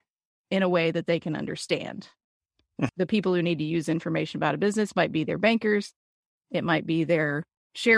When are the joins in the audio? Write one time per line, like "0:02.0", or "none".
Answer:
0:02.9